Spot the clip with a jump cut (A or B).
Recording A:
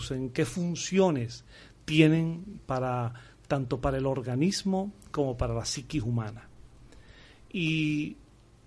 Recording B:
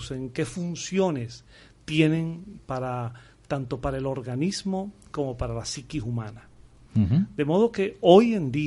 B